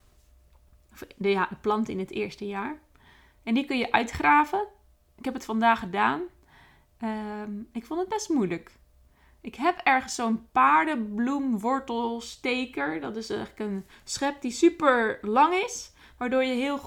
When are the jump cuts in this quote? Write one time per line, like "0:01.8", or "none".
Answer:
none